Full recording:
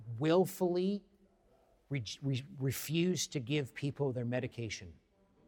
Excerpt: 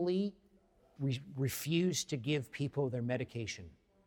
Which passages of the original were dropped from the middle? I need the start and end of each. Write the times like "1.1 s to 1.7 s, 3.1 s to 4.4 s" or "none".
1.6 s to 2.2 s